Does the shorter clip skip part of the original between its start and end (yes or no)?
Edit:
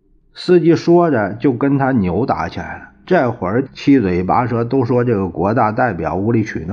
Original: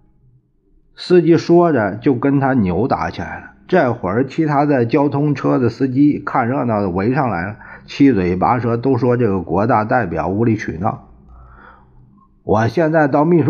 yes